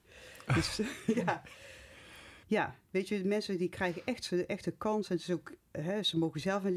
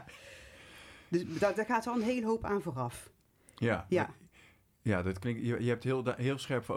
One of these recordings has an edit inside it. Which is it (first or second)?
first